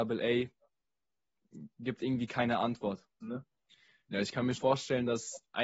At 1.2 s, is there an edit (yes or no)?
no